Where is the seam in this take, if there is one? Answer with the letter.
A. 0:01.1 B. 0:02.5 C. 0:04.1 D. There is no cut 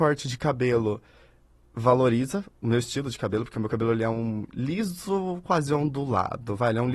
D